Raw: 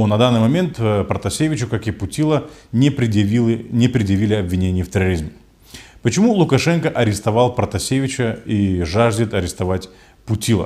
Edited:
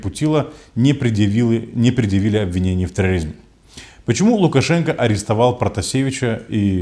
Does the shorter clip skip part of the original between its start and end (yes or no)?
no